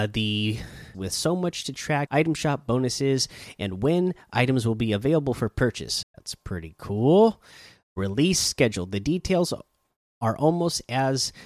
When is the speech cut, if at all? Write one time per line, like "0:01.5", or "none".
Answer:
0:00.9
0:02.1
0:06.0